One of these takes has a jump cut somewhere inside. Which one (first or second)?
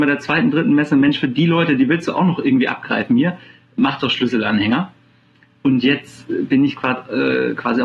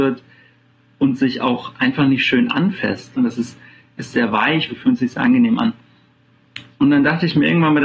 second